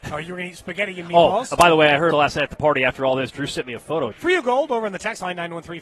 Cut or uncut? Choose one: cut